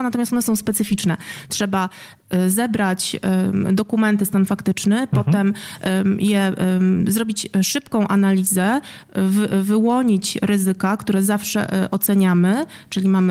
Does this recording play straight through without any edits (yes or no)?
yes